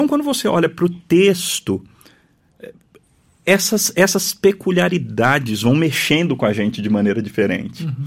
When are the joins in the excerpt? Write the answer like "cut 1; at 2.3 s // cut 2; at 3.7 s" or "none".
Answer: none